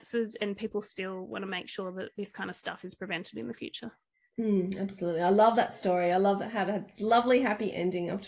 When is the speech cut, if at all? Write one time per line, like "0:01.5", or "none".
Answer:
none